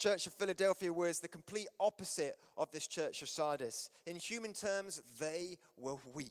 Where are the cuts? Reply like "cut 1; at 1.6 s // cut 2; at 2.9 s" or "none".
none